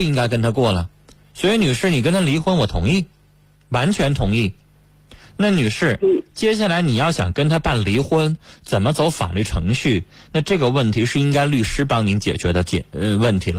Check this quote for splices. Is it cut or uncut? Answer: uncut